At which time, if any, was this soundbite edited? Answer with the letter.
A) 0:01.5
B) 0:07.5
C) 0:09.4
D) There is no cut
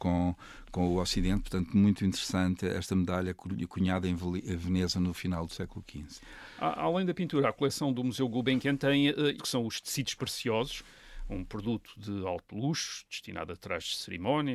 C